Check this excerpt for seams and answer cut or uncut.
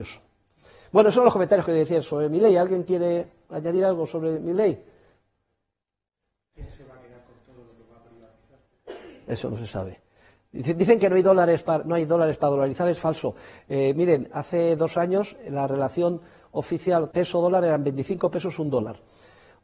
cut